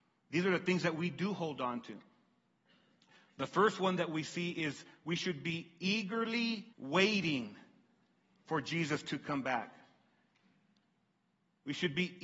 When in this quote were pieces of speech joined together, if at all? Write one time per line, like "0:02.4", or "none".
0:06.7